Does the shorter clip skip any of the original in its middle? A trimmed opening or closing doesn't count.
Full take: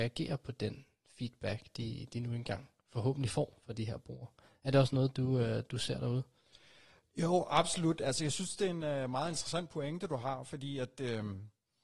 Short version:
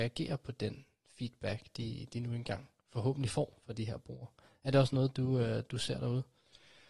no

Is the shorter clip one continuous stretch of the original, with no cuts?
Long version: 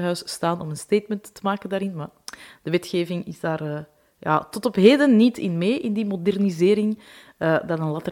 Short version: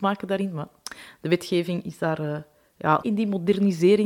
no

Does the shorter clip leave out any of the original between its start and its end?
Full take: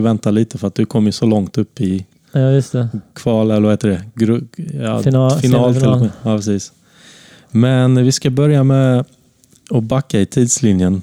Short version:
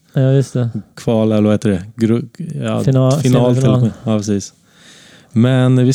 no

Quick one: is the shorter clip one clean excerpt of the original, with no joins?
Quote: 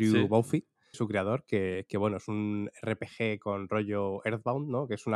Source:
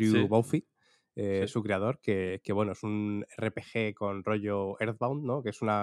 no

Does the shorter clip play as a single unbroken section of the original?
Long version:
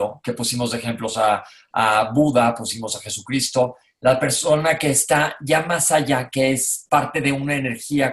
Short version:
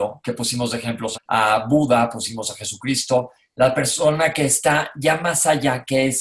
no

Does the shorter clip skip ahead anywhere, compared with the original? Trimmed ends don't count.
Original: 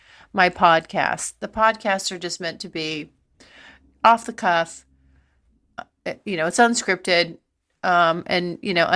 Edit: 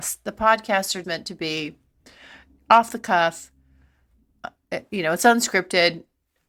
yes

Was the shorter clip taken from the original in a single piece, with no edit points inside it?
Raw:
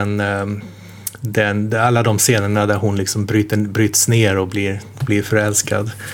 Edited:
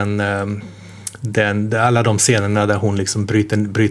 yes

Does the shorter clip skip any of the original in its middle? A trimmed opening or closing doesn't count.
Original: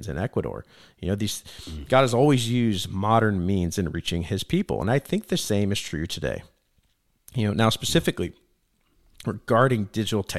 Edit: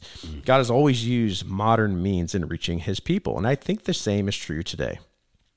no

